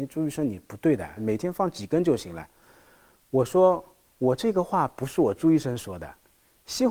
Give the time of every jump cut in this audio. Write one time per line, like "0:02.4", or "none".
0:01.2